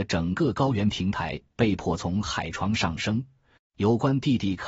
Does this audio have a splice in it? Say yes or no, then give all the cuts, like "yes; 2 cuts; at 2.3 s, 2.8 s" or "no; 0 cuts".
yes; 1 cut; at 3.6 s